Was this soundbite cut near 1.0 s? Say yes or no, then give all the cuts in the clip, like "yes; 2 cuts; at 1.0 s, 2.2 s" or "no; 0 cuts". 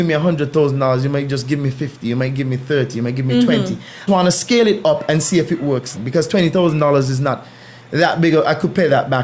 no; 2 cuts; at 4.1 s, 6.0 s